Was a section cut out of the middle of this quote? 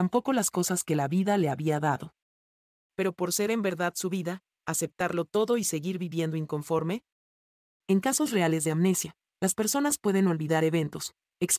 yes; 1 cut; at 4.6 s

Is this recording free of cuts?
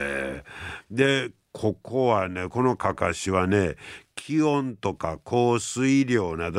yes; 0 cuts

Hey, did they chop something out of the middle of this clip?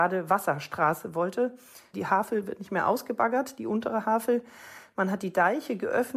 no; 0 cuts

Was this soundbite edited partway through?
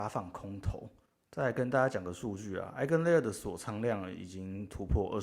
no; 0 cuts

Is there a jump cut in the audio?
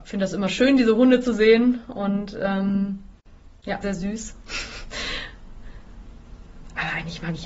yes; 1 cut; at 3.8 s

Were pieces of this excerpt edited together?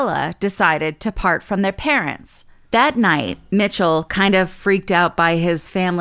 yes; 1 cut; at 2.7 s

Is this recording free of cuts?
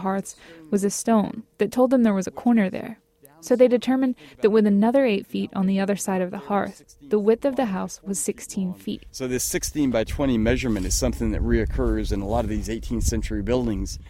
yes; 0 cuts

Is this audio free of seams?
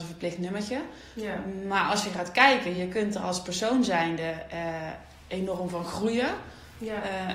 yes; 0 cuts

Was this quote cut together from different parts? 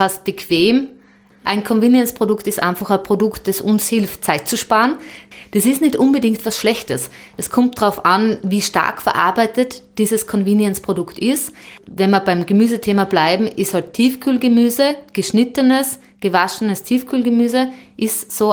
no; 0 cuts

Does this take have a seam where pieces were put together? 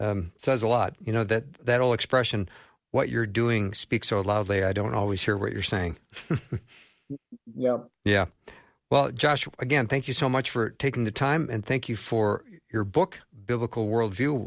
no; 0 cuts

